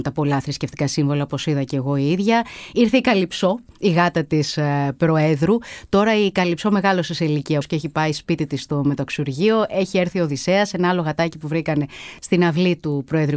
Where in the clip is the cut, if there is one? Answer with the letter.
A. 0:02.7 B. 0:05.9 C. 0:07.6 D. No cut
C